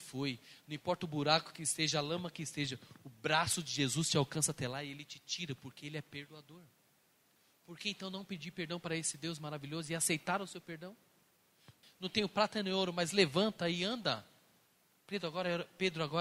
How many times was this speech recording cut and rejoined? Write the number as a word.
one